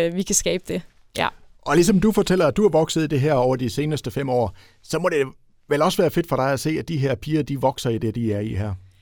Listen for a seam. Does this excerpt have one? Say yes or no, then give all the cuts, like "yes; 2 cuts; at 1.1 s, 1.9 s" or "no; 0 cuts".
yes; 1 cut; at 7.4 s